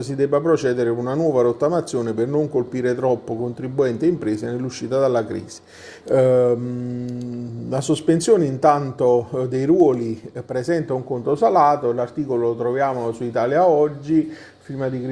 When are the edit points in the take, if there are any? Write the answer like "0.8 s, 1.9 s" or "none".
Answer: 6.0 s